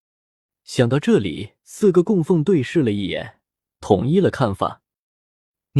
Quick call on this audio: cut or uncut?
cut